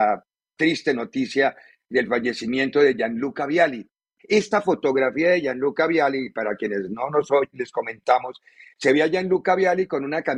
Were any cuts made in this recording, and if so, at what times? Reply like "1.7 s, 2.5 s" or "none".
4.2 s, 7.5 s